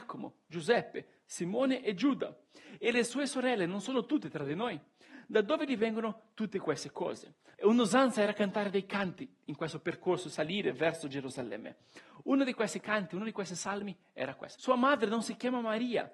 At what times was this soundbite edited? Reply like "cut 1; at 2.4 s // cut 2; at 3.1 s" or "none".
cut 1; at 7.5 s // cut 2; at 14.6 s